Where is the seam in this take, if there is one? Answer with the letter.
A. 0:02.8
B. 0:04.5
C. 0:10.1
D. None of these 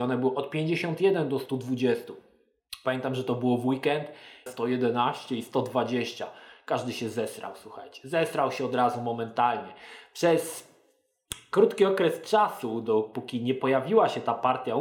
B